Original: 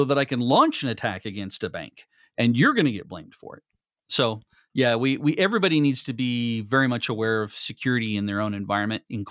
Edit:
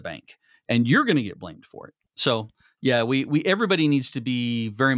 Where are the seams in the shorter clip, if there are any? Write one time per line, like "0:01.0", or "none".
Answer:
0:02.0